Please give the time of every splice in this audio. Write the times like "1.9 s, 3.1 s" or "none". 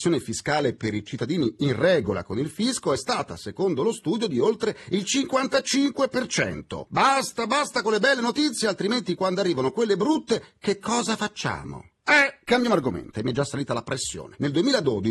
6.9 s, 13.1 s

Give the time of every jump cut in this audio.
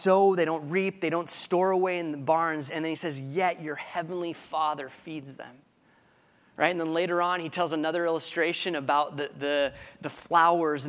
none

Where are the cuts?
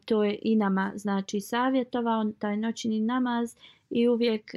none

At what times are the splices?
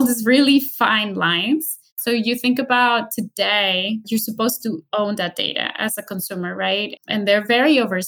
4.0 s, 7.0 s

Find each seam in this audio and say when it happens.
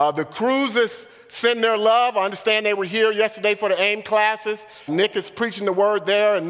4.9 s

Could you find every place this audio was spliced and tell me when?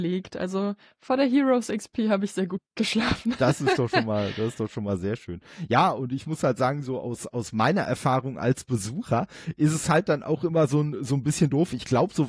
none

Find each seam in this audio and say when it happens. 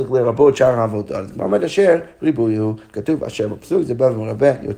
none

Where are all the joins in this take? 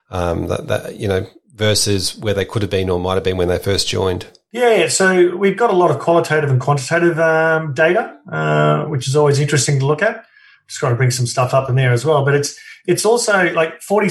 none

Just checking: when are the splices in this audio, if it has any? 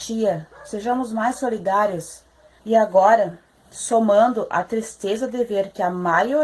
2.6 s

